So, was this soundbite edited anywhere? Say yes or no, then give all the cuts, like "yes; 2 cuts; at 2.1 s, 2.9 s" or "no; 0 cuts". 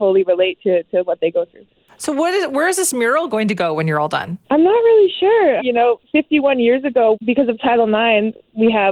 yes; 3 cuts; at 4.4 s, 5.6 s, 7.1 s